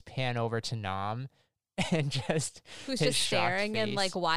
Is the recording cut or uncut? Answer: uncut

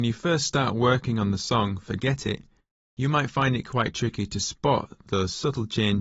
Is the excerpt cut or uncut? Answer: uncut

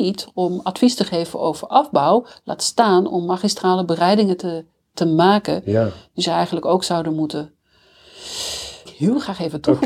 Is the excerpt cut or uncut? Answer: cut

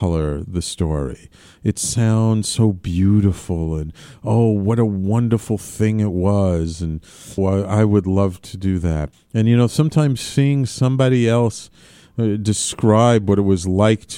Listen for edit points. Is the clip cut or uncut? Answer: cut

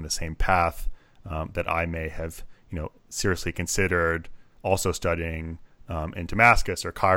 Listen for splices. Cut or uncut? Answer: uncut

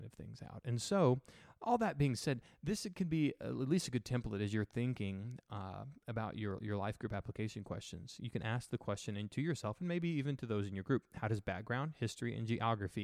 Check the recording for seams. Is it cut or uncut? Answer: uncut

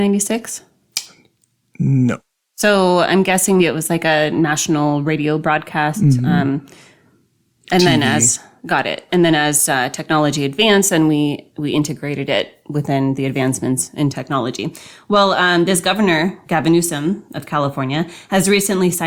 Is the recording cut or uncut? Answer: cut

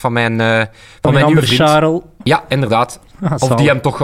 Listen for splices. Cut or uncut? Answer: cut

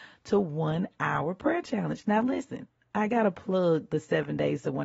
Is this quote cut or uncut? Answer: uncut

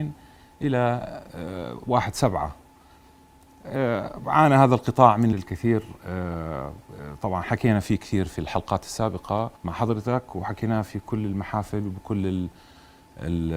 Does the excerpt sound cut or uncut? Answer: cut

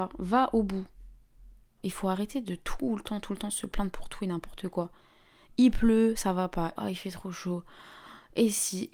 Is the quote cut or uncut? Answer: cut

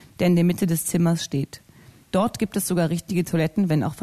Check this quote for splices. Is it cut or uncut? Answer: cut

